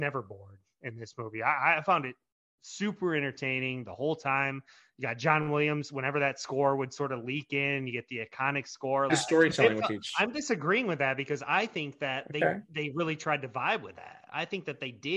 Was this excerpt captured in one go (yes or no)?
no